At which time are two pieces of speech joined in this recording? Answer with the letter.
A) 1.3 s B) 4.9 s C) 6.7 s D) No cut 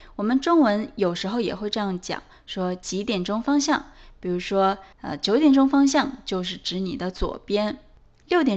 B